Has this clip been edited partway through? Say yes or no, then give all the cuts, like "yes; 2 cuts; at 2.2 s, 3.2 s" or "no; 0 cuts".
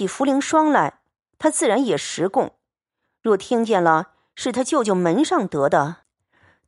no; 0 cuts